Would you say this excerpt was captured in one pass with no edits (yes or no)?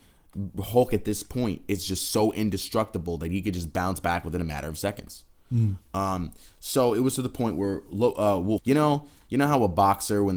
no